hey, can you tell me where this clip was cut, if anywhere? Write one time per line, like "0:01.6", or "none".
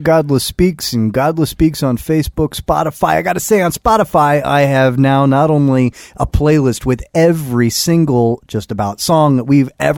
none